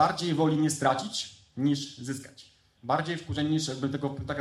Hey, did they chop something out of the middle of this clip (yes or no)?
yes